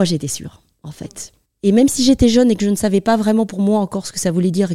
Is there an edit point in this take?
yes; 1 cut; at 1.5 s

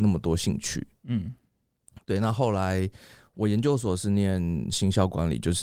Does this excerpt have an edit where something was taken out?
no; 0 cuts

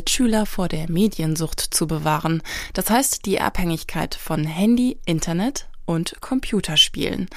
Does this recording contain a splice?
no; 0 cuts

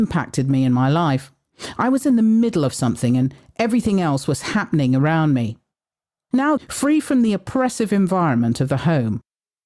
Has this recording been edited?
yes; 1 cut; at 6.6 s

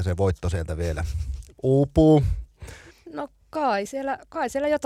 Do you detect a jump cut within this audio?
yes; 1 cut; at 2.9 s

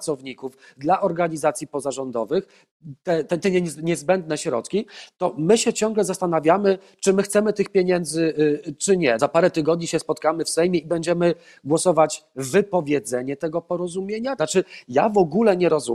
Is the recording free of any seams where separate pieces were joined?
no; 2 cuts; at 9.2 s, 14.4 s

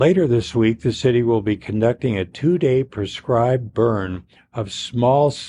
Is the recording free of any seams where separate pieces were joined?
yes; 0 cuts

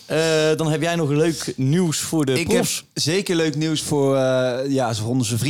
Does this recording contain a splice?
no; 0 cuts

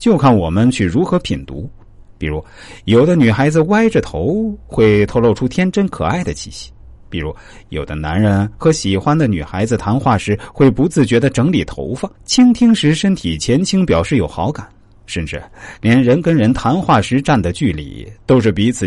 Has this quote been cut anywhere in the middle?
yes; 1 cut; at 12.1 s

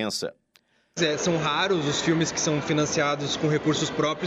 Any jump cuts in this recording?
yes; 1 cut; at 1.0 s

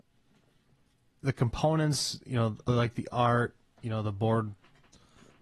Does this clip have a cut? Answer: yes; 1 cut; at 2.7 s

